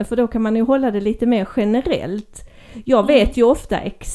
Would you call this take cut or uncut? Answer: uncut